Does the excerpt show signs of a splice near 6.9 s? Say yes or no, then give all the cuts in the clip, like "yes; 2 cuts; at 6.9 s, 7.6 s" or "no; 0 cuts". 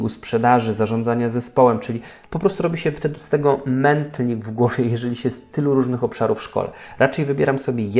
no; 0 cuts